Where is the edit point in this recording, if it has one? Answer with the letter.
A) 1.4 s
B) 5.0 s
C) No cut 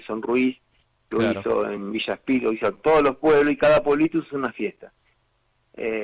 C